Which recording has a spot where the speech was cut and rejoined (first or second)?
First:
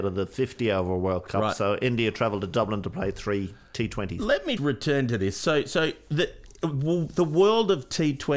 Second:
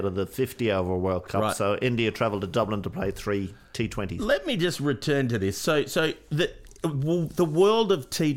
first